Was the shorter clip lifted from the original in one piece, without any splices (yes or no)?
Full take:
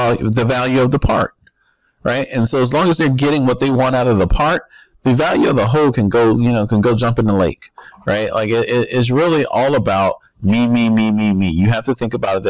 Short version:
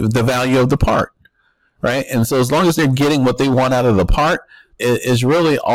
no